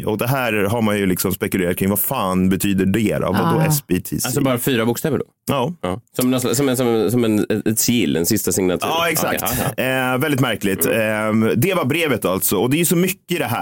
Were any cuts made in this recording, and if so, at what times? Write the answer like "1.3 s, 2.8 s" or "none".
6.1 s